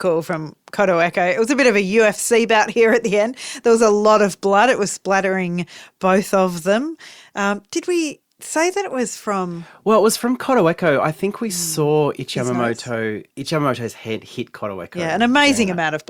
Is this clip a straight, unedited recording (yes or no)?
no